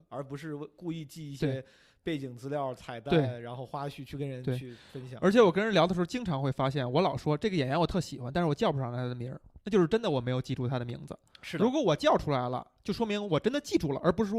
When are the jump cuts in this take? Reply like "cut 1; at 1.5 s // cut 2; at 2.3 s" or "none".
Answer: none